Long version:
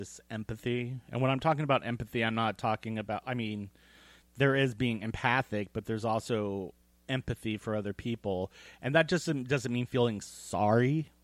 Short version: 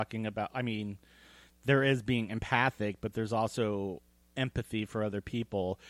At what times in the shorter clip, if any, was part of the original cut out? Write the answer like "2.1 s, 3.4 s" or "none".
none